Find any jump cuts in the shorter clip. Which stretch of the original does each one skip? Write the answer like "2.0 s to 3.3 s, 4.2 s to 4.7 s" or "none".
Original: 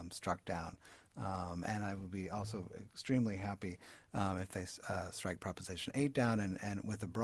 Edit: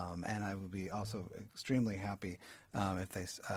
none